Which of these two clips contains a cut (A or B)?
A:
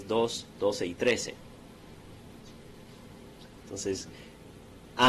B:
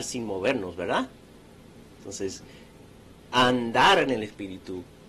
A